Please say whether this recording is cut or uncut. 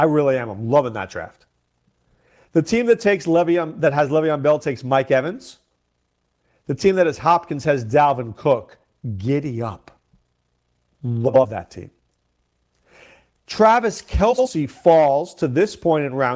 uncut